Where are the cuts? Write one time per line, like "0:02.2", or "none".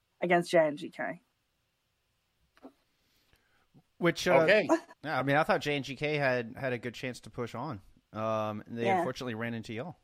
0:04.9